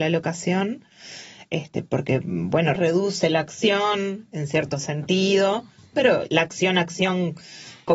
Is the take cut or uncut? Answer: cut